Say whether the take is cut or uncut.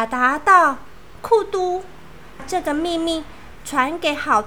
cut